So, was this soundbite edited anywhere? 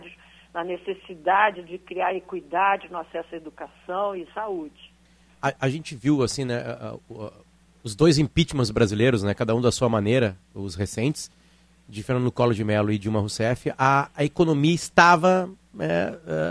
no; 0 cuts

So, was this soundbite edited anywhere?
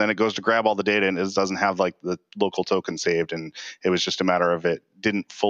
no; 0 cuts

